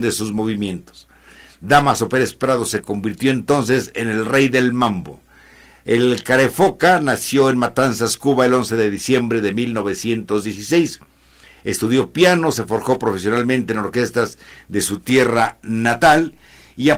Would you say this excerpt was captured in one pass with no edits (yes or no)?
yes